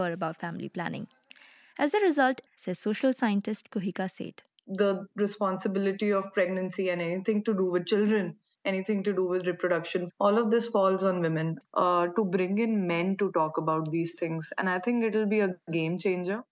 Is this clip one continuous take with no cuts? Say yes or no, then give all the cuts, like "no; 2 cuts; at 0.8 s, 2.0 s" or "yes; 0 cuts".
no; 2 cuts; at 2.5 s, 11.6 s